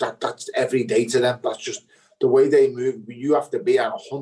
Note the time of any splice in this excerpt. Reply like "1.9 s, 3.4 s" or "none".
none